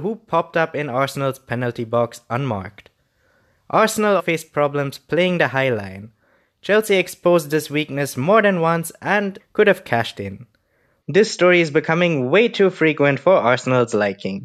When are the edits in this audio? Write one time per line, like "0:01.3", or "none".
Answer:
0:04.2
0:09.4
0:11.0